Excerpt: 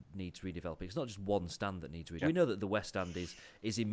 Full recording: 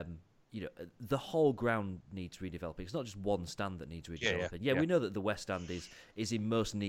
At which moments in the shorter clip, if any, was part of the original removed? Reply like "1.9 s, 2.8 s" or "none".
2.2 s